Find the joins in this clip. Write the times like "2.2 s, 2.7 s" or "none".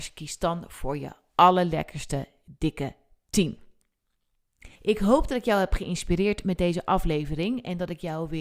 4.8 s